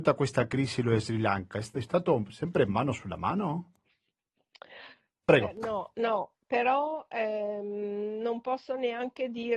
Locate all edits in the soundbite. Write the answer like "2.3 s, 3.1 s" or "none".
5.2 s